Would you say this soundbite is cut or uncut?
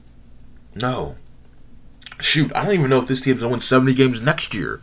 uncut